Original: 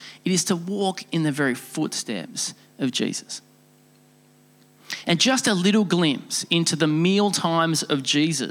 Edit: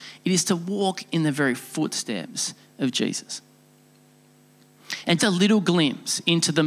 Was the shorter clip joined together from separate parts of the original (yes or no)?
yes